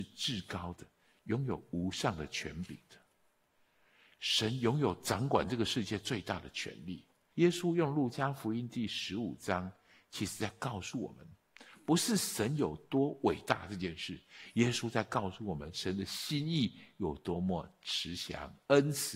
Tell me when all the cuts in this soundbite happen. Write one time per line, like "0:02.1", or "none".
0:07.3